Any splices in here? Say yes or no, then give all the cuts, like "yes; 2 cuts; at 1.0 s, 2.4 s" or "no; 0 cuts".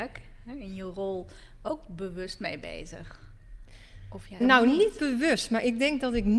yes; 1 cut; at 4.4 s